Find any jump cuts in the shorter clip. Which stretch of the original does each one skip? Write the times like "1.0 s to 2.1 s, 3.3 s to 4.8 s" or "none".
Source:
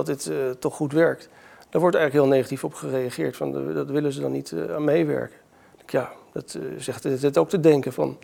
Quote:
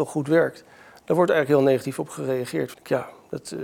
3.4 s to 5.8 s